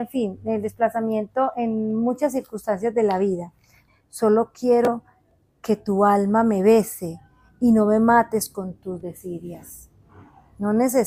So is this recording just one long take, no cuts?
no; 1 cut; at 3.9 s

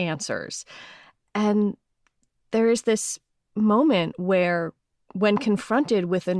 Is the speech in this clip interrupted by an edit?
no; 0 cuts

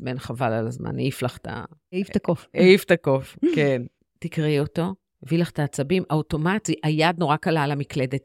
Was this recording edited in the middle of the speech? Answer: no; 0 cuts

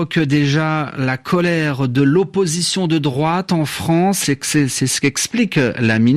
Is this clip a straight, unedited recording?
no; 1 cut; at 4.2 s

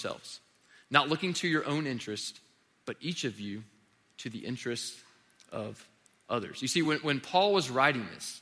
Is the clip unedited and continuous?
yes; 0 cuts

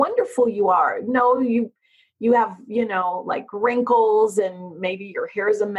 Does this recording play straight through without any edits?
yes; 0 cuts

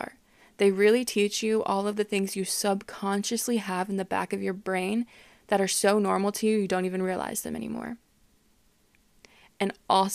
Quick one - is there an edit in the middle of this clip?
no; 0 cuts

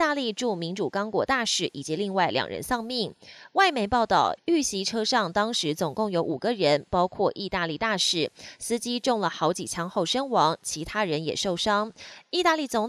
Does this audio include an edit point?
yes; 1 cut; at 4.4 s

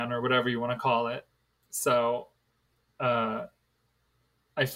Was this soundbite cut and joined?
no; 0 cuts

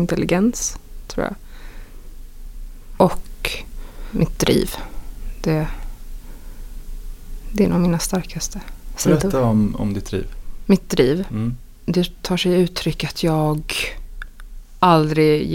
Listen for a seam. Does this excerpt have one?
yes; 1 cut; at 3.0 s

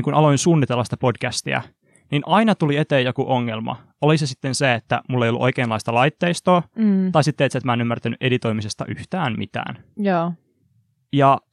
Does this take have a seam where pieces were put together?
no; 0 cuts

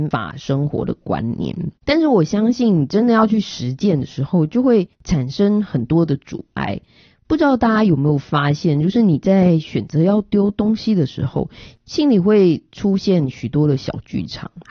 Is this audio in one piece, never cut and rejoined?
no; 1 cut; at 1.7 s

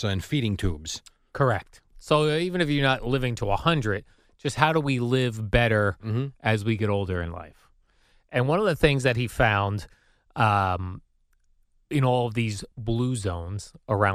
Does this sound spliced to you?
yes; 1 cut; at 1.9 s

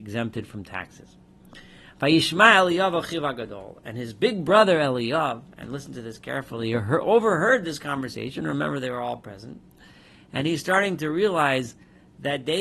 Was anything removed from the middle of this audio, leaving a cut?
no; 0 cuts

